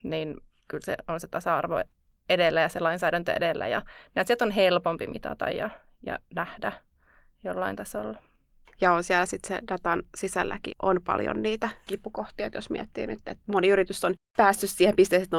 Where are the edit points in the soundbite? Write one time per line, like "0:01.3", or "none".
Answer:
0:08.6
0:10.7